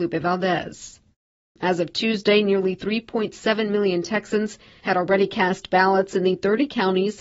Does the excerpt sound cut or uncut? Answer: cut